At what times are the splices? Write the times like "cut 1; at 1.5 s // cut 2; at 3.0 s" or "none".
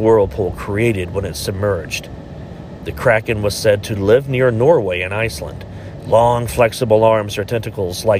cut 1; at 2.8 s